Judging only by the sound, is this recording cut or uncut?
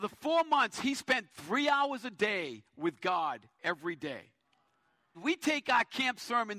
cut